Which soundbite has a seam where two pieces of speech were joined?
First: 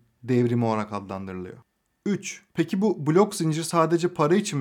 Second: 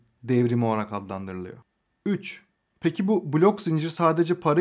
first; 1 cut; at 2.5 s

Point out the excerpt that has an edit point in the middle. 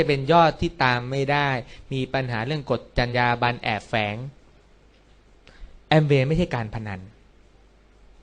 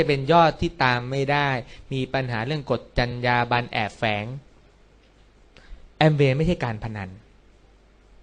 first; 1 cut; at 3.1 s

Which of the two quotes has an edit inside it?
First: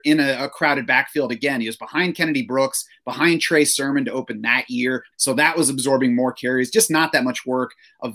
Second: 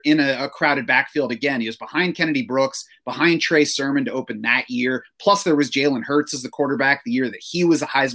first; 1 cut; at 5.1 s

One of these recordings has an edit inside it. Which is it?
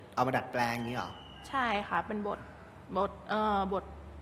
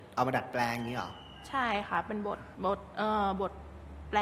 second; 1 cut; at 2.5 s

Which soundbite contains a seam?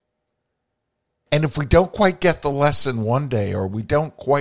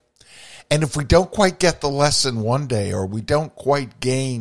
first; 1 cut; at 1.3 s

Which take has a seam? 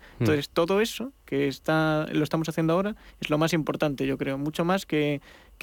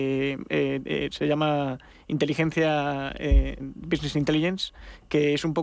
second; 1 cut; at 3.6 s

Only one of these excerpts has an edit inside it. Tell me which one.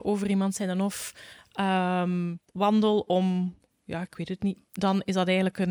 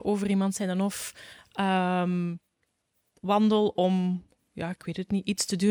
first; 2 cuts; at 2.4 s, 4.6 s

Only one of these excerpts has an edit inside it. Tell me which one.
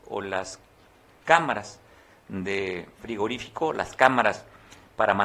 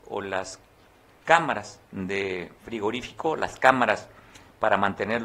second; 1 cut; at 1.8 s

